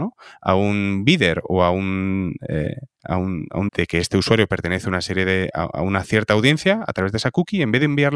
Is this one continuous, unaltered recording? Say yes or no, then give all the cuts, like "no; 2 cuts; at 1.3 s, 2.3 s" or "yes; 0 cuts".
no; 1 cut; at 3.7 s